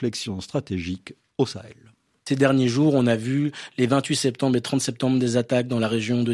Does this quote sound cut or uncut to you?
uncut